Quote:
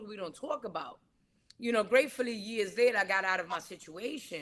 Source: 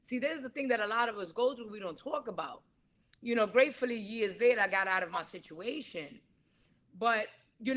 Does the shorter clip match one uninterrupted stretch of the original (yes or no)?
yes